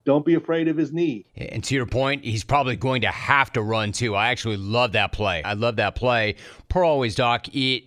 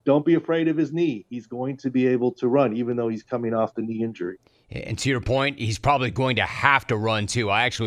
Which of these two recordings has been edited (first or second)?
first